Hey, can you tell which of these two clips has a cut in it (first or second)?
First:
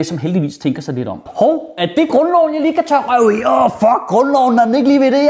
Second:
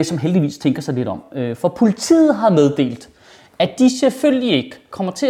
first